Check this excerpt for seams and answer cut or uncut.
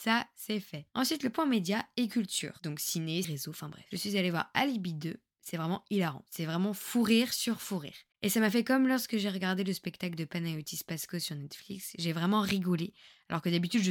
cut